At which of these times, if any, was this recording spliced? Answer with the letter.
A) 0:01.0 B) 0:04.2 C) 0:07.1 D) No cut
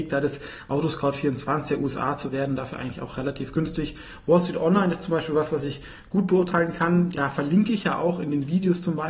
C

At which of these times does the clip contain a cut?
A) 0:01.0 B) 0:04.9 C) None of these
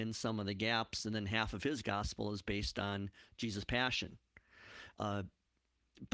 B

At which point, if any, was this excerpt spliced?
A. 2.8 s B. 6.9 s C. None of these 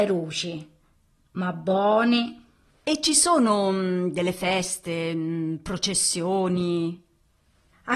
A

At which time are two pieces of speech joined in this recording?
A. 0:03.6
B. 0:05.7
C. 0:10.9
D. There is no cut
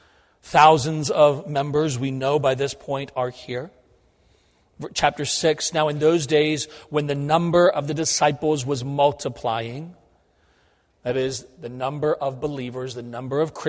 D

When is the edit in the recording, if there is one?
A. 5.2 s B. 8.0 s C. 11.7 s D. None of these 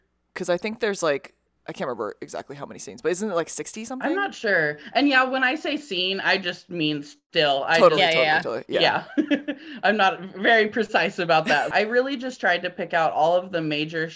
C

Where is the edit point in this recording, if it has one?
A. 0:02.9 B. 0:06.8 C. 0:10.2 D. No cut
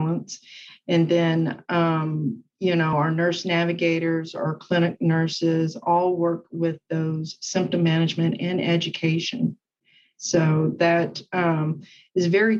D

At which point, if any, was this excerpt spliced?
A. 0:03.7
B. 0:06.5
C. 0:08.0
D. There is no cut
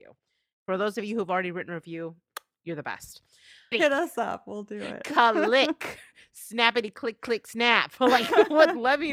A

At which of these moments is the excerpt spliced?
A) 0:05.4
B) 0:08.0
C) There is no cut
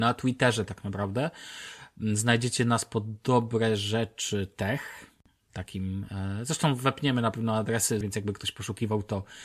B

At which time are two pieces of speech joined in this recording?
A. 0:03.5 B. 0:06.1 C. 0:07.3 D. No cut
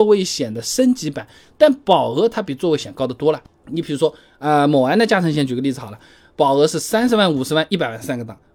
D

